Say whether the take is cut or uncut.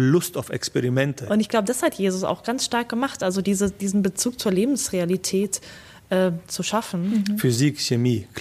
cut